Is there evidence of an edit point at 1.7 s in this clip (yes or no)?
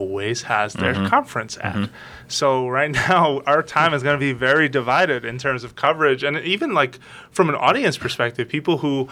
no